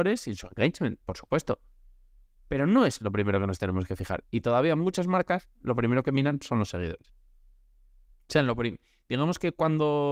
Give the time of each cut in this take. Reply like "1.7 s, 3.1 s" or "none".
none